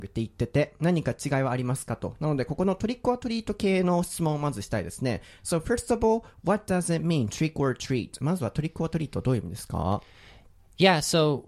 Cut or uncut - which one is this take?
uncut